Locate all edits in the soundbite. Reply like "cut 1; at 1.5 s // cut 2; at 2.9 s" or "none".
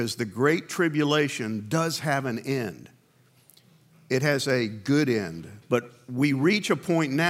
cut 1; at 5.6 s